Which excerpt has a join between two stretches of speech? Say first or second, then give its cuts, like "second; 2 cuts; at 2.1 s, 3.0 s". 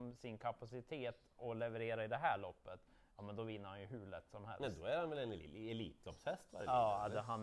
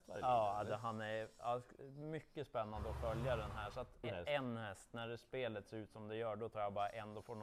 second; 1 cut; at 4.0 s